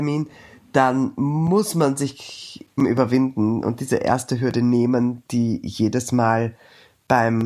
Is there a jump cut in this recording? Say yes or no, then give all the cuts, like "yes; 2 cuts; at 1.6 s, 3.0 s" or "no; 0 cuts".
yes; 1 cut; at 2.8 s